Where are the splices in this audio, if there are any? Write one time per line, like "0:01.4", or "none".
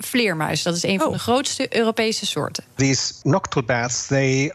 0:02.7